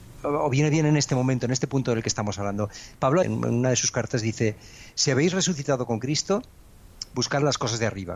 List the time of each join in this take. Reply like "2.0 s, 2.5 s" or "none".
3.2 s